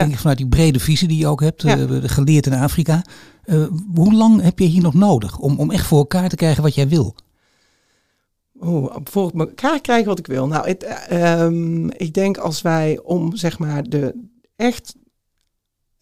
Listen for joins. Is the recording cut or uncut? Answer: uncut